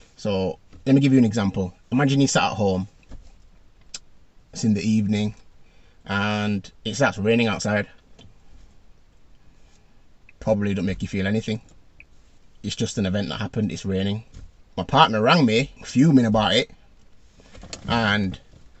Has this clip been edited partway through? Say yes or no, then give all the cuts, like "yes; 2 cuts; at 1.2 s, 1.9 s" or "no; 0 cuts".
yes; 3 cuts; at 10.4 s, 14.6 s, 15.8 s